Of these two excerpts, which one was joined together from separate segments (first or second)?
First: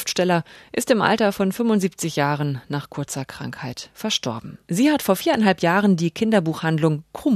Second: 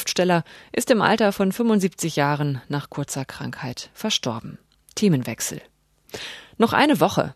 first